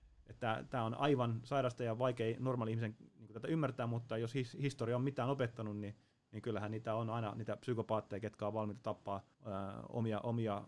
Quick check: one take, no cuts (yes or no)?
no